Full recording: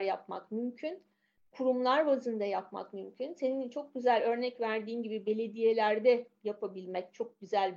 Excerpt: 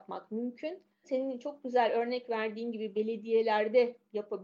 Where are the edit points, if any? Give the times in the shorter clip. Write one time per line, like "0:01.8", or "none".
0:01.0